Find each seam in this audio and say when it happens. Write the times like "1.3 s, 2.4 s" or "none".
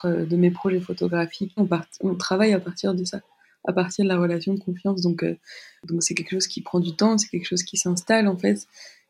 1.6 s